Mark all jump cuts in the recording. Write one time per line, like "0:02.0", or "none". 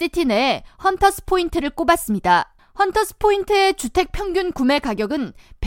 0:02.6